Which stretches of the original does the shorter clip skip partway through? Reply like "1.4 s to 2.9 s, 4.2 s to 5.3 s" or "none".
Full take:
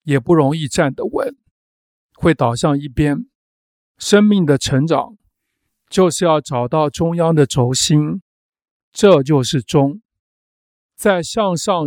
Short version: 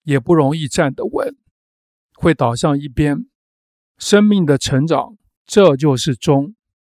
5.4 s to 8.8 s

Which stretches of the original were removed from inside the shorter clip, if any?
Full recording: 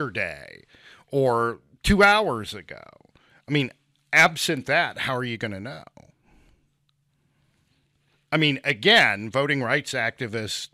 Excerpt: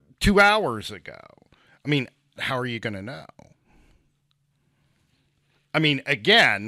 4.0 s to 4.9 s

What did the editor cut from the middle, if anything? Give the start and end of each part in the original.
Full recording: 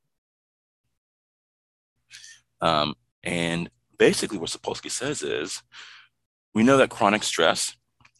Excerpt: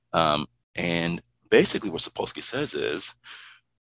none

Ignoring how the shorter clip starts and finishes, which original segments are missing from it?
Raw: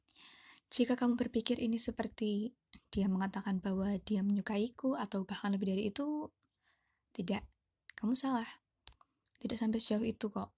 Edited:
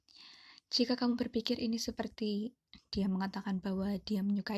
none

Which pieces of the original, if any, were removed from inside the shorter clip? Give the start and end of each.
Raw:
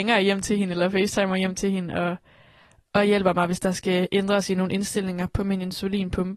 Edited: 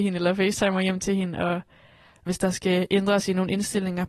2.8 s to 3.5 s

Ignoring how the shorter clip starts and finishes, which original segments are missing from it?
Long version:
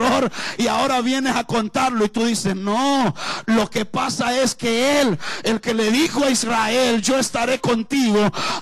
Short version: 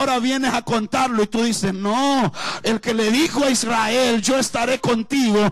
3.4 s to 5.4 s

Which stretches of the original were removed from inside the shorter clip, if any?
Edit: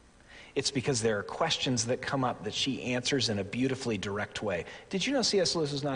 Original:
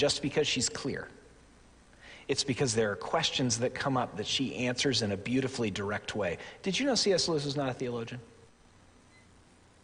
none

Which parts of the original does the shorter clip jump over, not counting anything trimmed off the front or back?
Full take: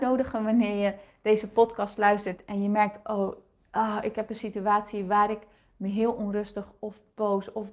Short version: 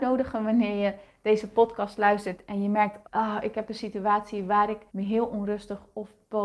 3.0 s to 3.6 s, 5.5 s to 5.7 s

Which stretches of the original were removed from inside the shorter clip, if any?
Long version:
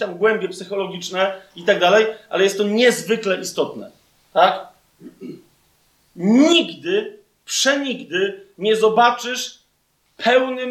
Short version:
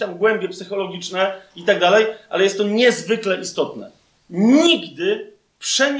4.2 s to 6.0 s

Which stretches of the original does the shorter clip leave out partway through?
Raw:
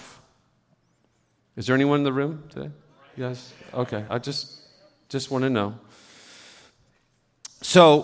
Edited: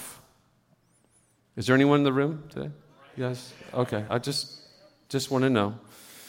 none

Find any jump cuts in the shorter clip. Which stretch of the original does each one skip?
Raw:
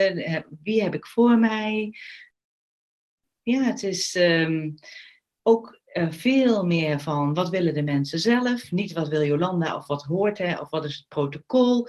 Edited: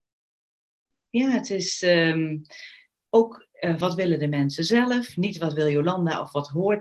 6.1 s to 7.4 s

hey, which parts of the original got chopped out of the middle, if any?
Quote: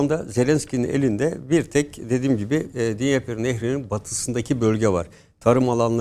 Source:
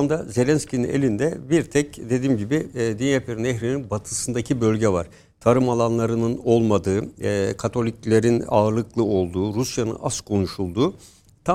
none

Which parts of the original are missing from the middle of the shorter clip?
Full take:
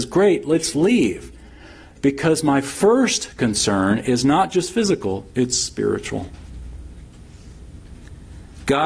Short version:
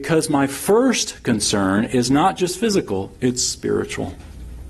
none

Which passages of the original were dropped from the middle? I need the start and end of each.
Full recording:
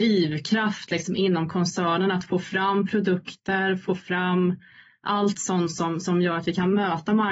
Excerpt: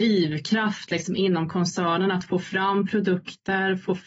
none

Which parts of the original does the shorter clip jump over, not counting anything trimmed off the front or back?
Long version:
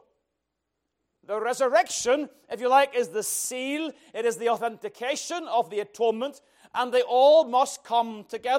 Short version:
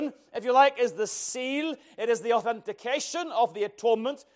none

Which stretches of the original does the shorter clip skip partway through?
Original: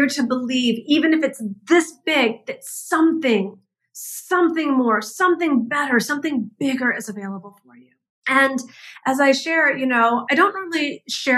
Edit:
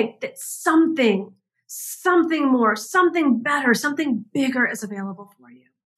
none

